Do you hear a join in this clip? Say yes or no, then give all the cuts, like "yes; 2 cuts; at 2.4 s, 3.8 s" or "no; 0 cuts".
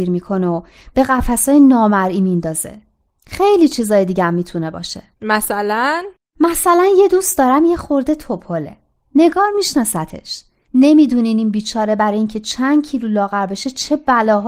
no; 0 cuts